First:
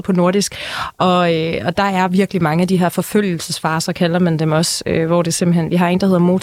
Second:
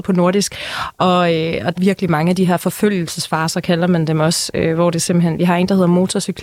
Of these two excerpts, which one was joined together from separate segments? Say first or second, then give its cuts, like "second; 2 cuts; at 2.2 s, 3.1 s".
second; 1 cut; at 1.8 s